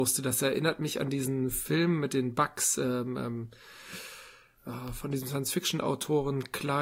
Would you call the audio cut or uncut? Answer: uncut